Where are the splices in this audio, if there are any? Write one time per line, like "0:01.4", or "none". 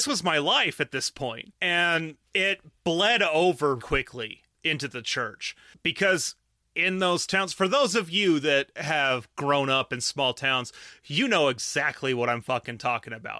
0:03.8